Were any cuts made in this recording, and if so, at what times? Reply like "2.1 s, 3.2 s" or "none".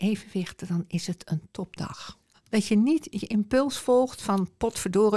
2.3 s